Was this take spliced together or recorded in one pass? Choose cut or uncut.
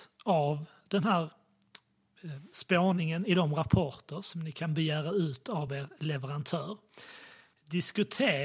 uncut